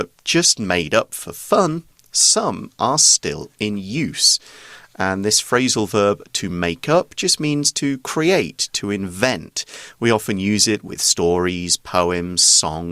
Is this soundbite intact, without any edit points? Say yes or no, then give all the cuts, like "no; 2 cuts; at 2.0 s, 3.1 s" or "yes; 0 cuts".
yes; 0 cuts